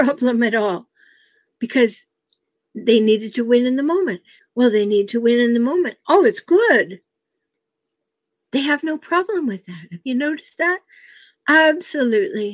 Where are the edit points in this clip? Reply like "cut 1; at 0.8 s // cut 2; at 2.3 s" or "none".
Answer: cut 1; at 4.4 s